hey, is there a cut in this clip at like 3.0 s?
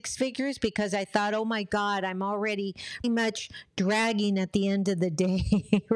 yes; 1 cut; at 3.0 s

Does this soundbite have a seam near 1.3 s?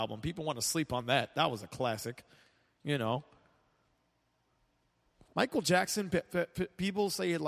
no; 0 cuts

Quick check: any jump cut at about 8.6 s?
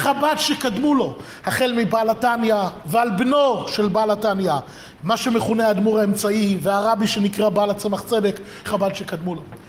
yes; 1 cut; at 8.6 s

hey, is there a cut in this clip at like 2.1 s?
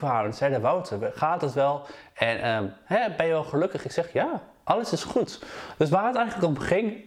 no; 0 cuts

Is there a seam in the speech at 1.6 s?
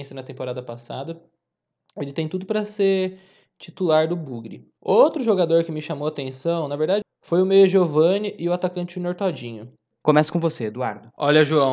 no; 3 cuts; at 4.8 s, 7.0 s, 9.9 s

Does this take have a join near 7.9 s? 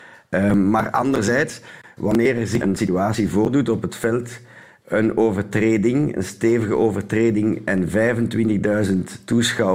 no; 2 cuts; at 2.6 s, 4.8 s

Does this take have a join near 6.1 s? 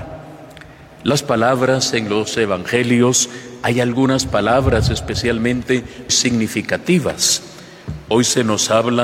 yes; 1 cut; at 6.1 s

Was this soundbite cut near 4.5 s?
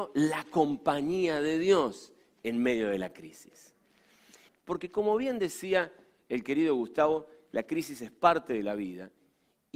yes; 1 cut; at 4.5 s

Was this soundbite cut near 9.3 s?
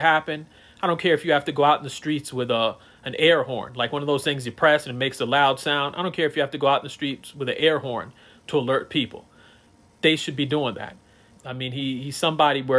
no; 1 cut; at 11.3 s

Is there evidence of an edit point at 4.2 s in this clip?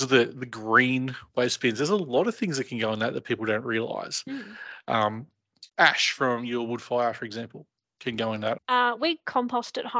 no; 2 cuts; at 5.7 s, 8.6 s

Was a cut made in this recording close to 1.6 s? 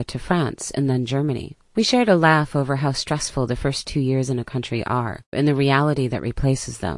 no; 1 cut; at 5.3 s

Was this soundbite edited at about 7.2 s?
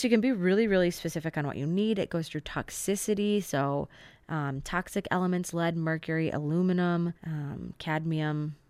yes; 1 cut; at 7.2 s

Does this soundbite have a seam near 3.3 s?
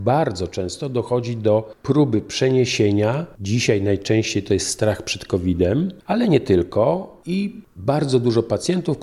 yes; 1 cut; at 3.3 s

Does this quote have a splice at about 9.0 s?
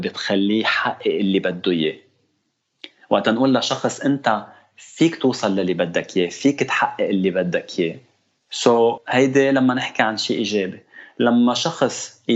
yes; 1 cut; at 9.0 s

